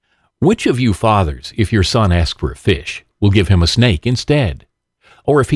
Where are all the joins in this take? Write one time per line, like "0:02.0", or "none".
none